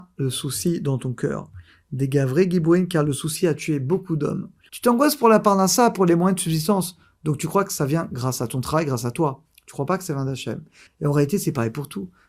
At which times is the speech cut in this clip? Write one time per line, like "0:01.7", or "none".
0:04.7
0:10.9